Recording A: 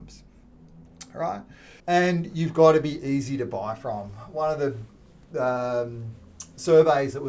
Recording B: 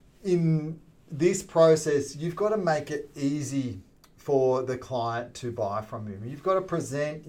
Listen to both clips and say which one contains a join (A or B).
A